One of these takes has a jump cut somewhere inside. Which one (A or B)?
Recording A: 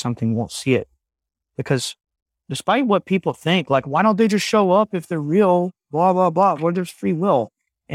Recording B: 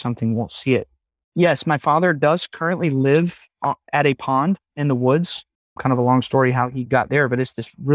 B